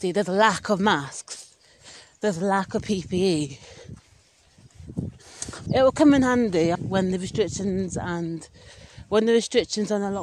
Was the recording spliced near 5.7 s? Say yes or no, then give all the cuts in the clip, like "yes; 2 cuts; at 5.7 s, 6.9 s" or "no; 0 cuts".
yes; 2 cuts; at 5.7 s, 6.7 s